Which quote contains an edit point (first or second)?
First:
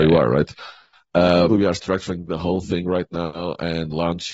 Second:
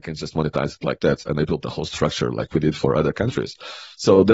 first